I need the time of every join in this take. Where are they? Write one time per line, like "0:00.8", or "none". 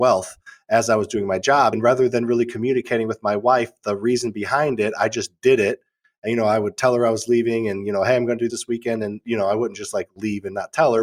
0:01.7
0:08.5

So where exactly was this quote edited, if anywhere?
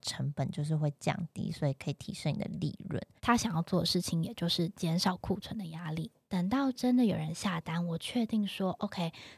0:03.2

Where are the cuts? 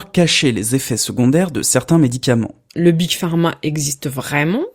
0:02.7

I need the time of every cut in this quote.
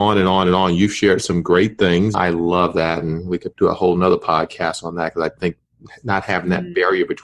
0:02.1
0:03.5

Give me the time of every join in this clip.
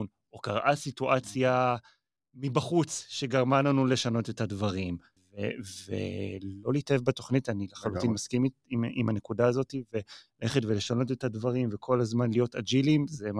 none

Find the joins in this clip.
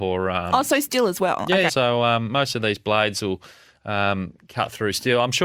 0:01.7

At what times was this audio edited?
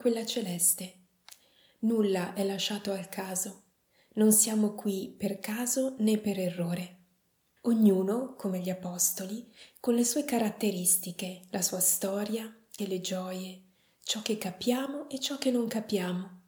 0:07.6
0:12.8

